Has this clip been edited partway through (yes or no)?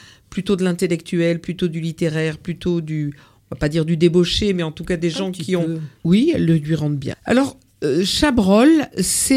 yes